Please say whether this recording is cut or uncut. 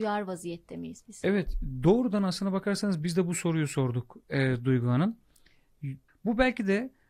cut